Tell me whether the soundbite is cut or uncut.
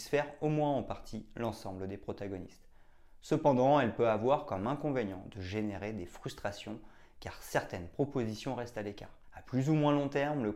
cut